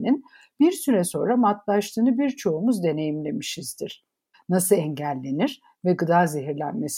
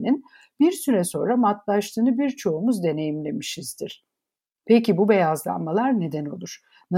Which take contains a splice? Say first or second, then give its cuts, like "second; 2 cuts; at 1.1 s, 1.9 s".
first; 1 cut; at 4.3 s